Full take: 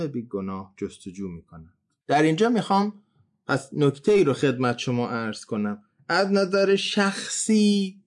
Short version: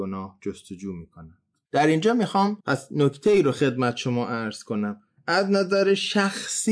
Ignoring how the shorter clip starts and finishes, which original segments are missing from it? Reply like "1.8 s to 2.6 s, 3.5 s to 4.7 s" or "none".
3.0 s to 3.4 s